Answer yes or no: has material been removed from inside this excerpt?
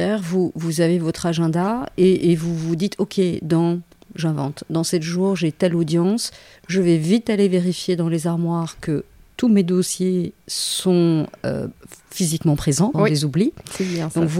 yes